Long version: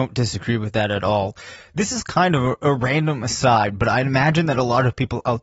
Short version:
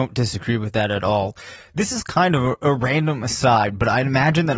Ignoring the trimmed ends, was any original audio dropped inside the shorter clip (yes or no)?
no